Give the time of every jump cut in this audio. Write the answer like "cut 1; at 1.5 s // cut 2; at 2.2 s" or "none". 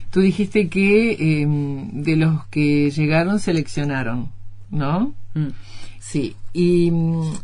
cut 1; at 6.0 s